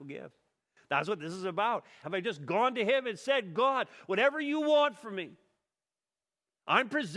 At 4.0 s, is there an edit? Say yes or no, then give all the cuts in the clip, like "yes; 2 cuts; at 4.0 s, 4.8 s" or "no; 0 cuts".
no; 1 cut; at 2.0 s